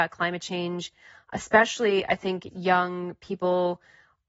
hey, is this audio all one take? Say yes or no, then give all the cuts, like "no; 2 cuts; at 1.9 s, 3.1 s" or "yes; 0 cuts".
no; 1 cut; at 2.5 s